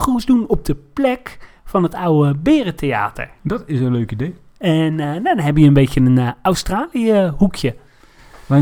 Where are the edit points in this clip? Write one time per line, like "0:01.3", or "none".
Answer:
0:03.4